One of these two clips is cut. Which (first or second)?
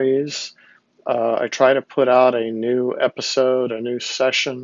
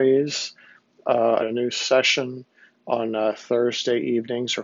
second